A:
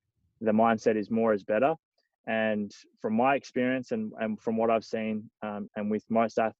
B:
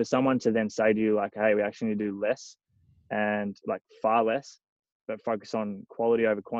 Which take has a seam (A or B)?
A